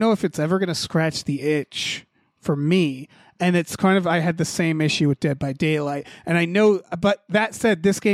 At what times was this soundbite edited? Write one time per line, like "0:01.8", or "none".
none